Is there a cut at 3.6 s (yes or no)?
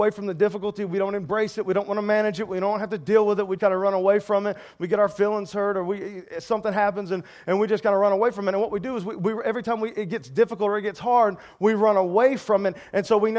yes